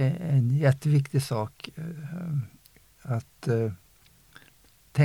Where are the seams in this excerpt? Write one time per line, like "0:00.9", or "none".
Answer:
none